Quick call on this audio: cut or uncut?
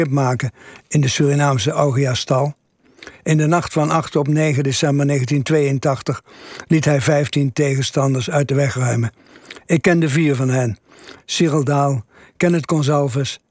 cut